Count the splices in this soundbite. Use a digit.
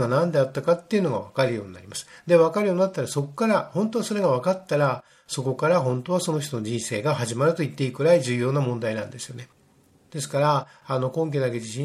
0